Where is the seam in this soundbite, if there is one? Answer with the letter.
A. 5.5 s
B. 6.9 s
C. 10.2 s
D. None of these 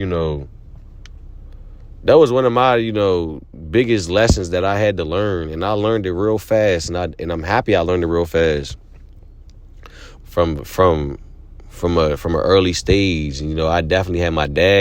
C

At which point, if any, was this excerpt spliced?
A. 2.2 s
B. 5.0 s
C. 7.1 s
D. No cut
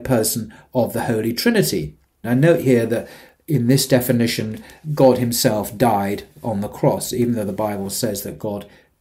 A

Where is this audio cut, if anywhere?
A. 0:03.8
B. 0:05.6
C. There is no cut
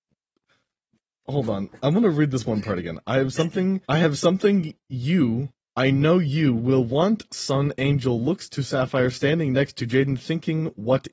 A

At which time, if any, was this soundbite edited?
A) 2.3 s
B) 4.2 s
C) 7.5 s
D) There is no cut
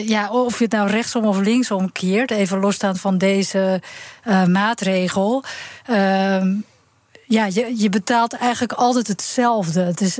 D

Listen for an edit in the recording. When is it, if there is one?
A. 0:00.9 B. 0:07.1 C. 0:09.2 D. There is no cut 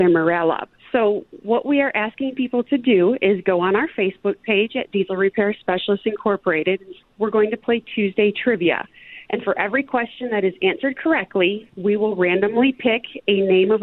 D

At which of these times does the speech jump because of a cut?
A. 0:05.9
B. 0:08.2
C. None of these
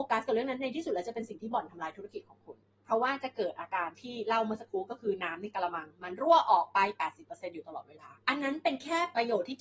B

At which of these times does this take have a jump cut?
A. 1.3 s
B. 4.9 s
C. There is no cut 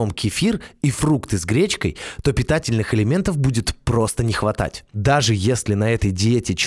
B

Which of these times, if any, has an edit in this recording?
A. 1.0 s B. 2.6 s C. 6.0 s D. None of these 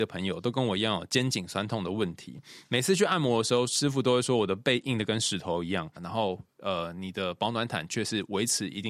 C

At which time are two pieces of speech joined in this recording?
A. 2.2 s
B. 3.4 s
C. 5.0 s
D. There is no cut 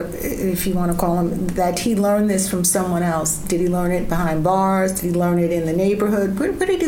D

